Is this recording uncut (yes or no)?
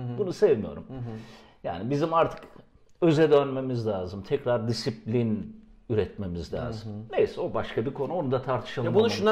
yes